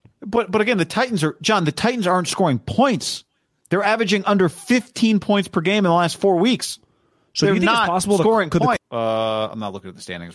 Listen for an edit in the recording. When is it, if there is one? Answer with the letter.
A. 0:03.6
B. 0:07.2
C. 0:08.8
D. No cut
C